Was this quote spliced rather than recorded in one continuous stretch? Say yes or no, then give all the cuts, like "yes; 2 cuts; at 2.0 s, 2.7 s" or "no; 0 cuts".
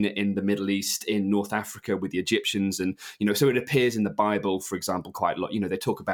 no; 0 cuts